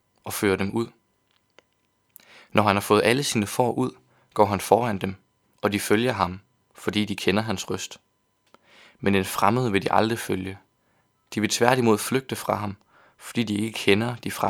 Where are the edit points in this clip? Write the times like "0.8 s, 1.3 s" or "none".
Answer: none